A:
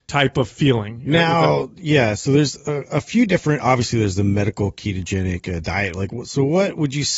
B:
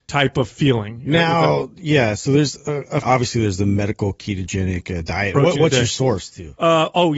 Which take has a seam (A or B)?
B